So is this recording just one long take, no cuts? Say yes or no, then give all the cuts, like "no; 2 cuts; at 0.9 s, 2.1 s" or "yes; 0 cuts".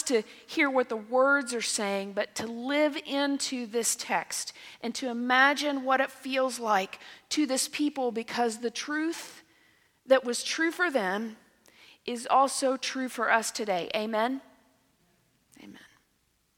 yes; 0 cuts